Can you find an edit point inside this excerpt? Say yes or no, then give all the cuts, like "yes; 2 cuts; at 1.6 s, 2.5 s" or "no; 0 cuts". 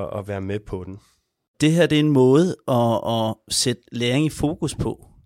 no; 0 cuts